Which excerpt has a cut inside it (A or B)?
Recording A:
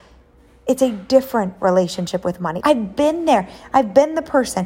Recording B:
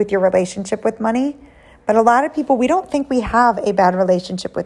A